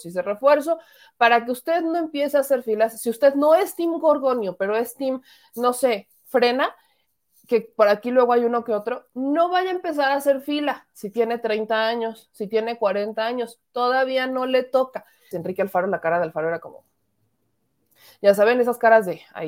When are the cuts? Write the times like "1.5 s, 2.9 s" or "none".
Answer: 15.3 s

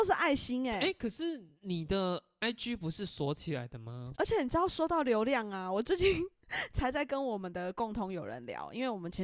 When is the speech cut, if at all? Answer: 4.1 s

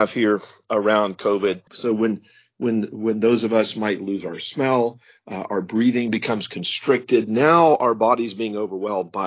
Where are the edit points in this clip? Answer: 1.7 s

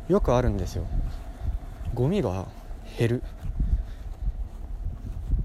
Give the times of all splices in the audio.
none

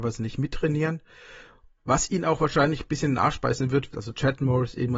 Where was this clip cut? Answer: 1.8 s, 3.9 s

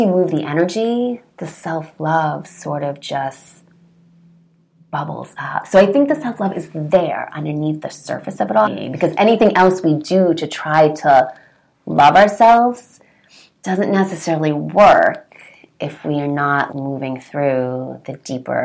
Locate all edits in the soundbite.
8.6 s, 16.7 s

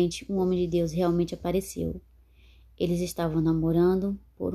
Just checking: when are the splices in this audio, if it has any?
none

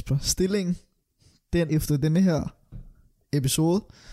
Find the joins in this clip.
1.7 s

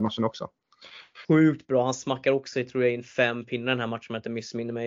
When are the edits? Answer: 1.2 s

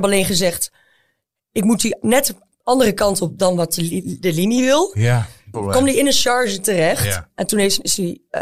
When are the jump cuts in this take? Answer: 5.5 s

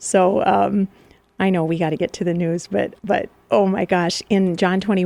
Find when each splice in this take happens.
3.0 s

